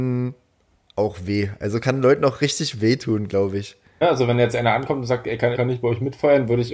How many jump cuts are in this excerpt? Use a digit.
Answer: 2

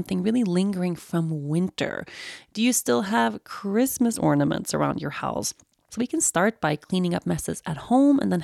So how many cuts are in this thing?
1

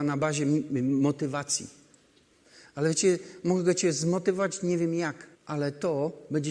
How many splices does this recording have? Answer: 1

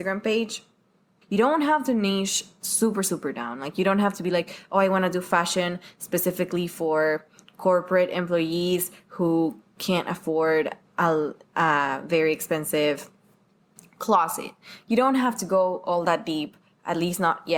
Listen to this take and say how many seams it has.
1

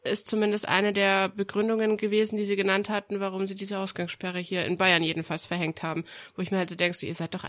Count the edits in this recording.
0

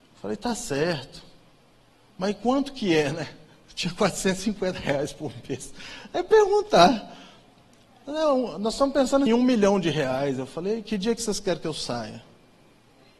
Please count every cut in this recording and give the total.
1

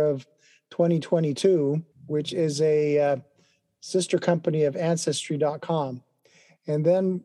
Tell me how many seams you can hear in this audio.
1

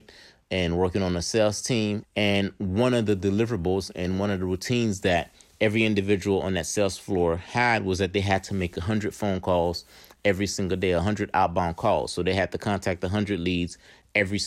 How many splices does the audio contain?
1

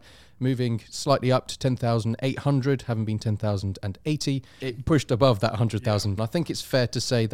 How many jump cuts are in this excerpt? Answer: 2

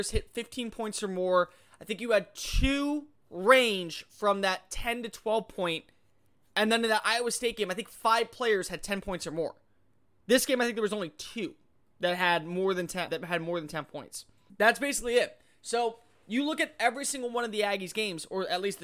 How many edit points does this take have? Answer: 2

